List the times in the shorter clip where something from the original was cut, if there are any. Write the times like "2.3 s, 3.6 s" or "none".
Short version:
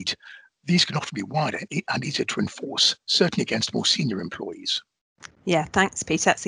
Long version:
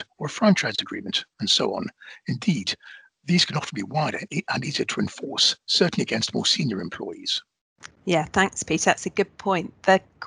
none

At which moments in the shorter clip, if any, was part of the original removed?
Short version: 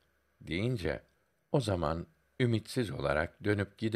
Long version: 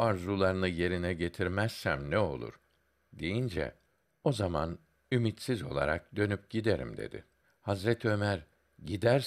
none

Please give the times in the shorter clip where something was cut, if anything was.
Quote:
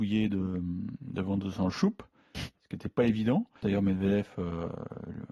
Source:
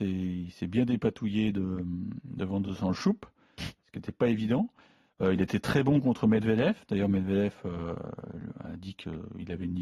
3.6 s

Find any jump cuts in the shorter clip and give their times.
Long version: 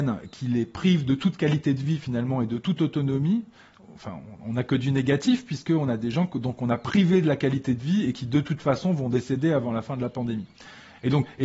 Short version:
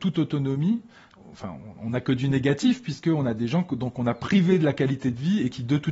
none

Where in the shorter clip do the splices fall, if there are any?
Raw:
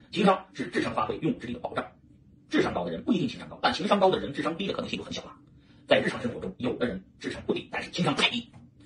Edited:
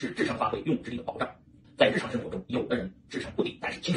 1.6 s

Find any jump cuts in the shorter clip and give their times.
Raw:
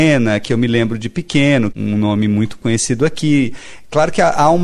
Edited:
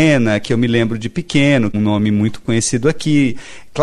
1.7 s

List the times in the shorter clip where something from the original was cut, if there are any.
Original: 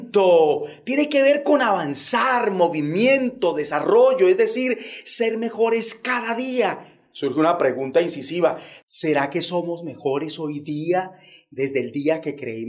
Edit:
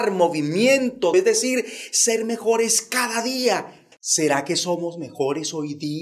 1.1 s, 3.9 s

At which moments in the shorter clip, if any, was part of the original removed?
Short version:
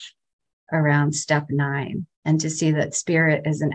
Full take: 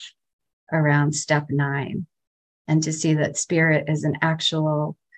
2.1 s

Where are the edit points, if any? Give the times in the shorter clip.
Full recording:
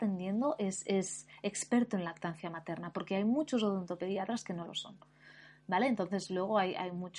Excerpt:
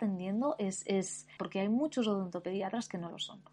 1.4 s

